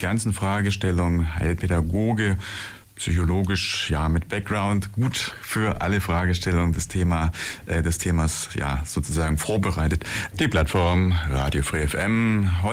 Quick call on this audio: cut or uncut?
cut